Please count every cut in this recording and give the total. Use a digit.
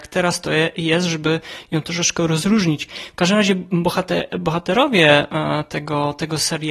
0